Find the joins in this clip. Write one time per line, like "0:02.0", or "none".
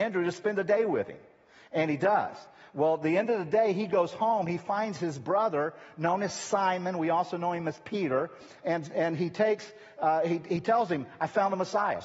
none